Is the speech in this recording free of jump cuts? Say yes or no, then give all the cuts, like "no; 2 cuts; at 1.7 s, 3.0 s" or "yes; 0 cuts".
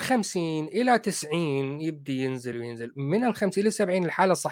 no; 1 cut; at 2.5 s